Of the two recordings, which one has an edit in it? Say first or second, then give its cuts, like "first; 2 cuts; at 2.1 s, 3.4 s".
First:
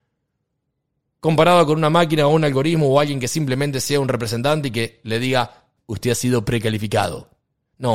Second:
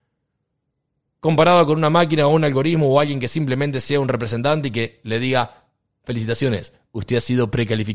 first; 1 cut; at 5.8 s